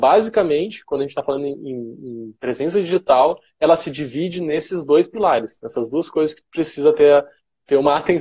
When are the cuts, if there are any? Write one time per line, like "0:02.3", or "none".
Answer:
none

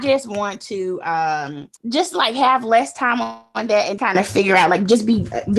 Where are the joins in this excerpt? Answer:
0:01.8
0:04.0

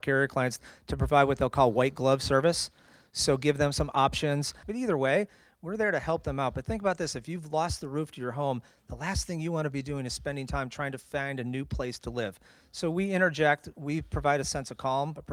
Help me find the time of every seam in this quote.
0:04.6

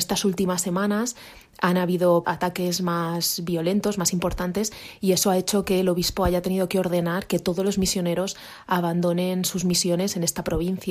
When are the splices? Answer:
0:02.2

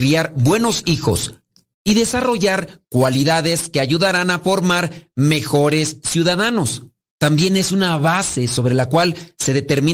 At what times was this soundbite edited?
none

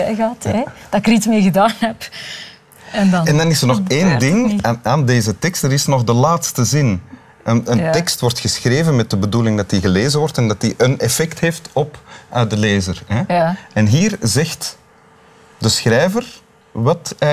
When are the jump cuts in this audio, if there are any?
none

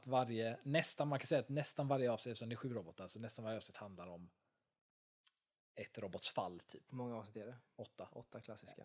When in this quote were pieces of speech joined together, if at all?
0:06.9

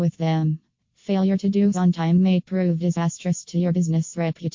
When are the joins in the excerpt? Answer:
0:01.7

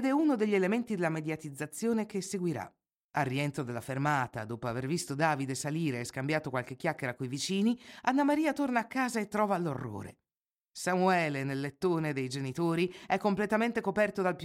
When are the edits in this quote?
0:03.0

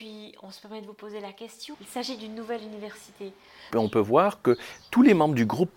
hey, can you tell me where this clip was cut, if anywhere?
0:01.7
0:03.7

